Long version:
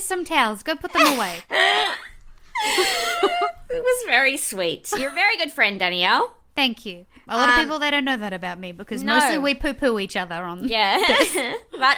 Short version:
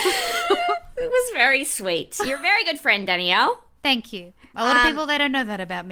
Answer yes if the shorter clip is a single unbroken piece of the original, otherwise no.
yes